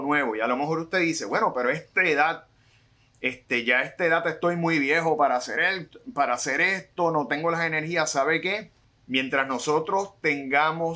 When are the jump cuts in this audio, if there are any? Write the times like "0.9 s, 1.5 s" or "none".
none